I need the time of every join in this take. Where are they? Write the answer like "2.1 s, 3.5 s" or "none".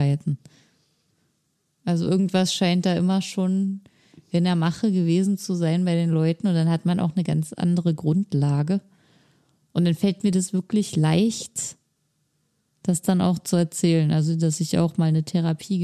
none

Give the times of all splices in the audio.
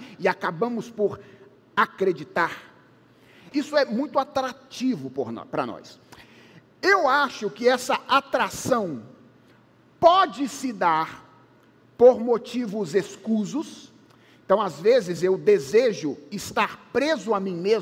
3.5 s

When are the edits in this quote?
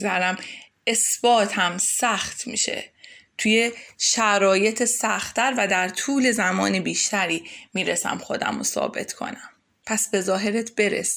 none

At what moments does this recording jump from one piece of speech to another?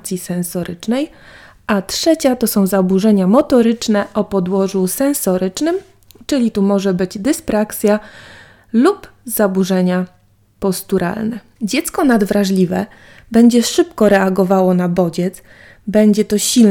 none

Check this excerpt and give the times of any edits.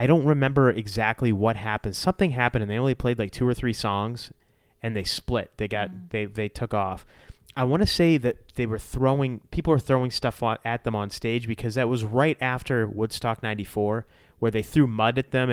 none

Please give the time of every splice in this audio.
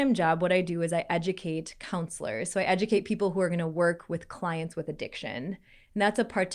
none

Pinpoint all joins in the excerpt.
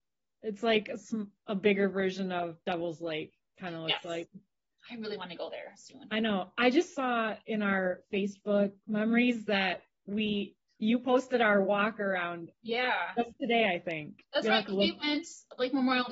none

